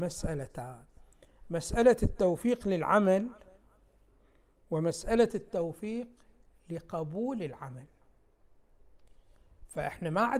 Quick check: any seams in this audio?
no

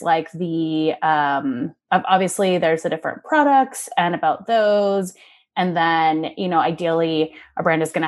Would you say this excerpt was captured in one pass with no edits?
no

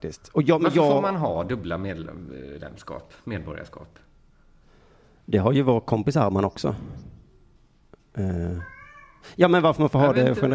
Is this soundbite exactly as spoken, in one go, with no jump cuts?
yes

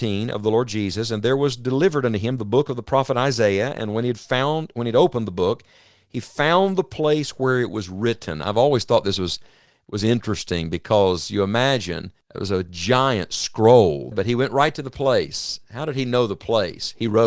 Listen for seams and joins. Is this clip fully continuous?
no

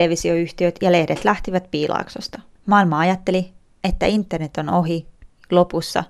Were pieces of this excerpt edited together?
yes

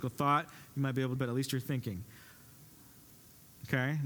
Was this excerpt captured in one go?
no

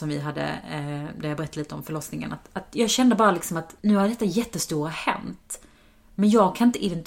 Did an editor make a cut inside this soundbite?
yes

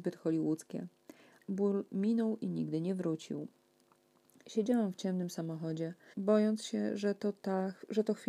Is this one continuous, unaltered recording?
no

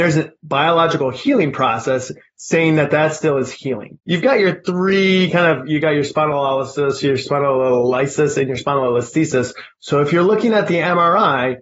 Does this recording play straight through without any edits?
no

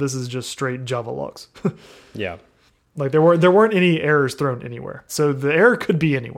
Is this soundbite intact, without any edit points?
no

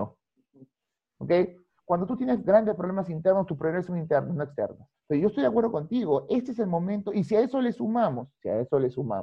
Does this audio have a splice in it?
yes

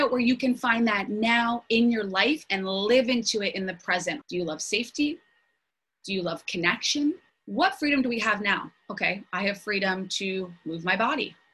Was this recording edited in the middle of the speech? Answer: yes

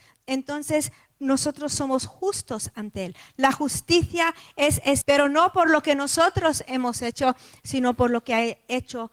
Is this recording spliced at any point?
yes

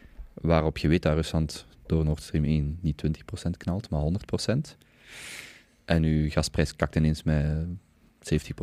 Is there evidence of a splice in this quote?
no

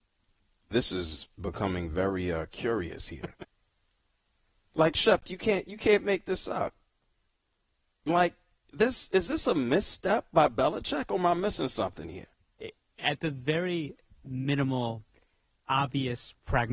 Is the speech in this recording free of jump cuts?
yes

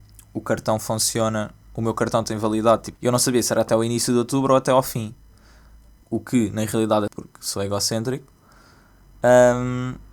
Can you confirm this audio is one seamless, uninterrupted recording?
no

